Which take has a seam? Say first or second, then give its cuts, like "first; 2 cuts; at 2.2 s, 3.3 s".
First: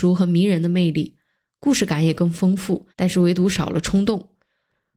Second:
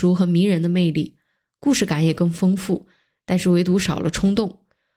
first; 1 cut; at 2.9 s